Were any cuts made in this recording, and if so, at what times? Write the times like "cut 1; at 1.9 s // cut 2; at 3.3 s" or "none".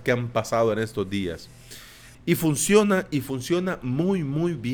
cut 1; at 2.1 s